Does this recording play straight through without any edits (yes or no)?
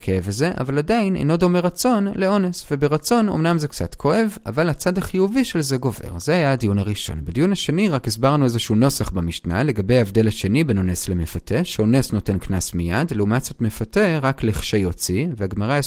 yes